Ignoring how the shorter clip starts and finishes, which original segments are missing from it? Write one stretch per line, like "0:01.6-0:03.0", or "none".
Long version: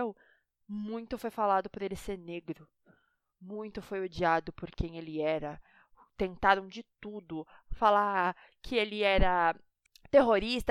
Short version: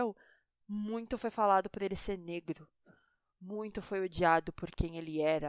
none